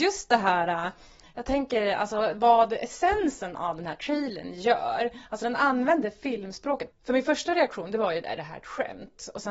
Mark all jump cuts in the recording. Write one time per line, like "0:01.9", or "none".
0:06.9